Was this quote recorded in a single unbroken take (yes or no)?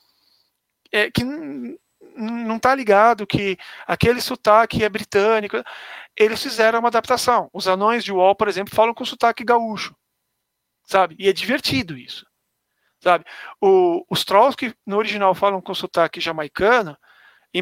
yes